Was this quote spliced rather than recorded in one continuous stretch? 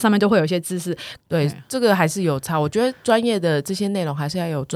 yes; 1 cut; at 1.2 s

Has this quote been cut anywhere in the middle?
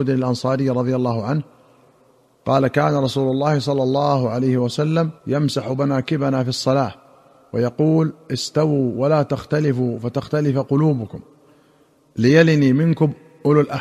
yes; 1 cut; at 5.2 s

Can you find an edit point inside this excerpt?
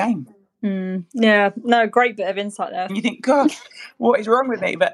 yes; 1 cut; at 2.9 s

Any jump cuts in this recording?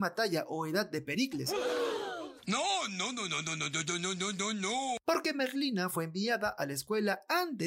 yes; 1 cut; at 2.4 s

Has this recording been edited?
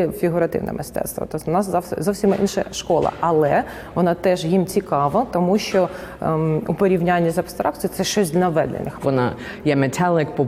yes; 1 cut; at 9.0 s

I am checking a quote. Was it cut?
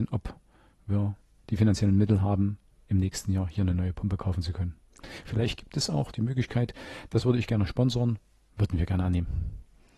yes; 1 cut; at 7.1 s

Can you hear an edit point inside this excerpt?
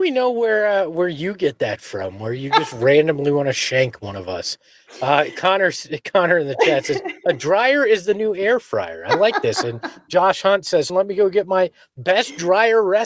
yes; 1 cut; at 10.9 s

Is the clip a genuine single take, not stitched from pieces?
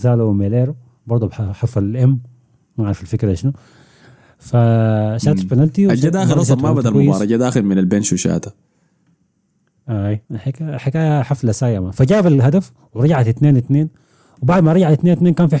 no; 1 cut; at 10.3 s

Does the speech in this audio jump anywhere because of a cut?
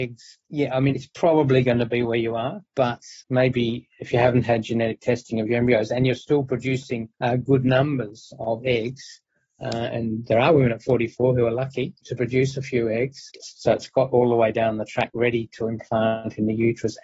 yes; 2 cuts; at 0.9 s, 13.4 s

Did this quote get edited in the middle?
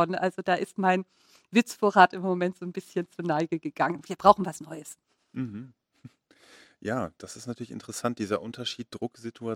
no; 0 cuts

